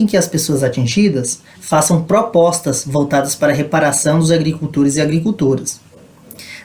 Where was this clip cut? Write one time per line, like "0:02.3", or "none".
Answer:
0:01.5